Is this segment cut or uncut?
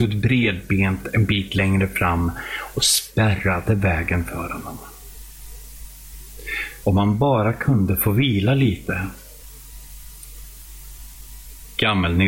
cut